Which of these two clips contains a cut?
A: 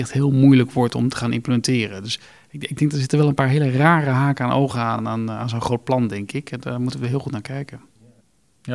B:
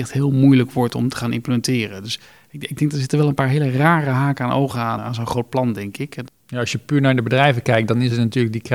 B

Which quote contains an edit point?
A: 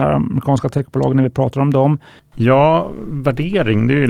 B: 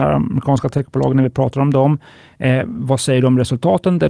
A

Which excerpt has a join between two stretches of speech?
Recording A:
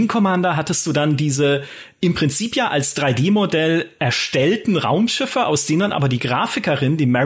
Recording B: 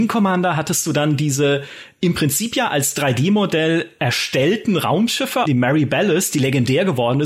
B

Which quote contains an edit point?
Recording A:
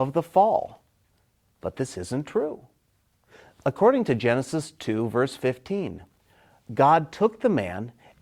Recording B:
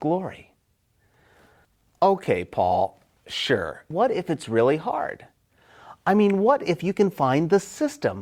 B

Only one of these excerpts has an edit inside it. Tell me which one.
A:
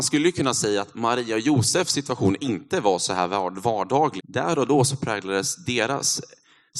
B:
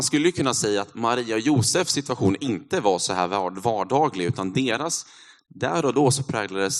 A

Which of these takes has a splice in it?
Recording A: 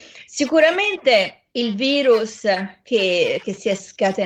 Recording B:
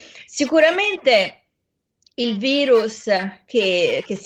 A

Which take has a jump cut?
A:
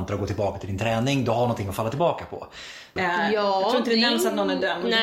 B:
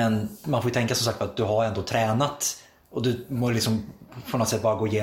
A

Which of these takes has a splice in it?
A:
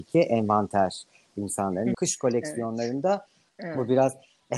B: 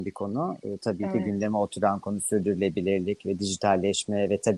A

